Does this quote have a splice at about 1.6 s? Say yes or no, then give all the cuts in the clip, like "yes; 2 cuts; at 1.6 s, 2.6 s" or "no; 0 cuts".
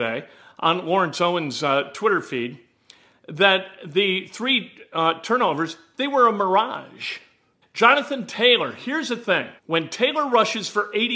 no; 2 cuts; at 7.6 s, 9.6 s